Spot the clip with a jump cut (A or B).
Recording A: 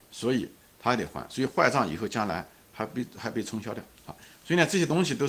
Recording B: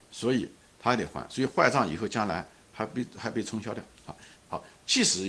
B